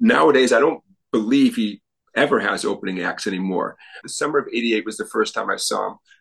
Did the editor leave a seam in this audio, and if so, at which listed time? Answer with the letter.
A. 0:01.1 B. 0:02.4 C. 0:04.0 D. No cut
C